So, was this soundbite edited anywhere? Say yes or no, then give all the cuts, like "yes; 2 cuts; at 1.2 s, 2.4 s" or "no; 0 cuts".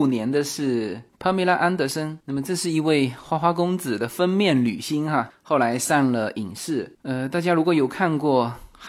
no; 0 cuts